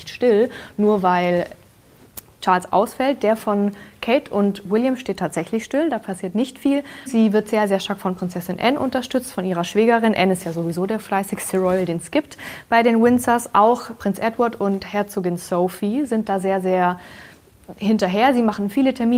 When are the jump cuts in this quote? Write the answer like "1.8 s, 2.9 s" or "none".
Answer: 7.1 s